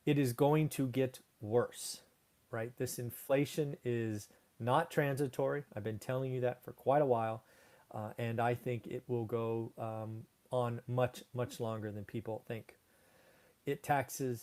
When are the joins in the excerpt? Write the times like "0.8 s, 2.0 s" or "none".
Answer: 13.5 s